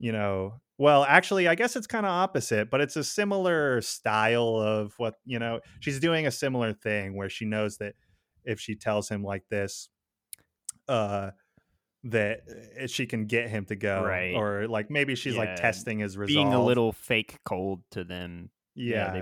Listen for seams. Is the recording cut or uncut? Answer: uncut